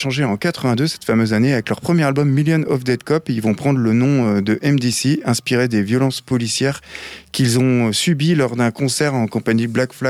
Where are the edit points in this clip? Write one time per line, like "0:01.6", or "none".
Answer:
none